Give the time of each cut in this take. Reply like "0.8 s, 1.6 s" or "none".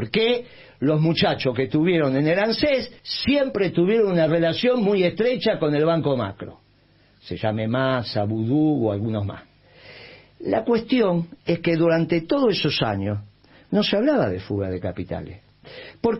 3.0 s

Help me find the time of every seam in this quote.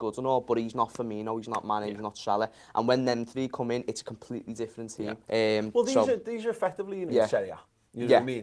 5.2 s, 7.1 s

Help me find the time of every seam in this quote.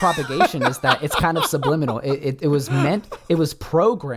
none

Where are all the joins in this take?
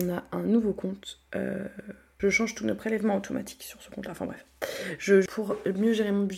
2.2 s, 5.3 s

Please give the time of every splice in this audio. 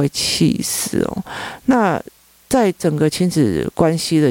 none

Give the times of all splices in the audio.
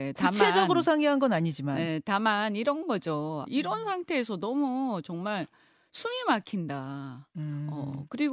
3.4 s

